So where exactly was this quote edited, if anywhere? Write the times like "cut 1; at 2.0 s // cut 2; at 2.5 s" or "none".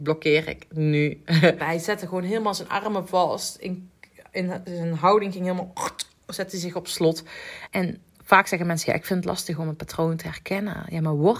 cut 1; at 1.6 s // cut 2; at 7.7 s